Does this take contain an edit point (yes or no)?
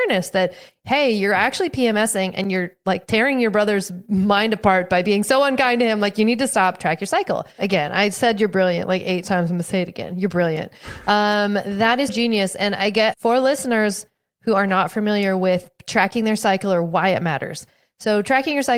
yes